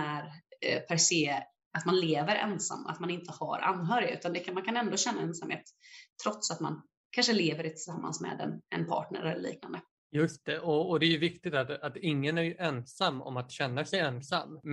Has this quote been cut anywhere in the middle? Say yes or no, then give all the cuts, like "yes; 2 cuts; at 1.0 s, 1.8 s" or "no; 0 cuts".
no; 0 cuts